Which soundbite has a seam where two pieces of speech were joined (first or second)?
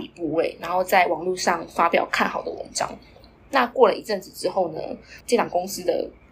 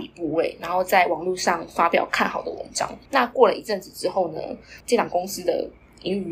second